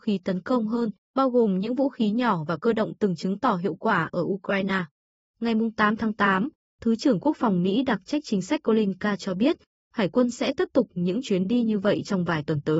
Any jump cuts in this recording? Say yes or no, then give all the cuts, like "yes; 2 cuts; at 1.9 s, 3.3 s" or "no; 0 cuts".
yes; 2 cuts; at 1.1 s, 5.2 s